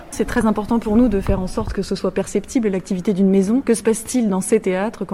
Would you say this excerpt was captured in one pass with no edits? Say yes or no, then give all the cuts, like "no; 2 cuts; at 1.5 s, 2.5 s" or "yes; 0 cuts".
yes; 0 cuts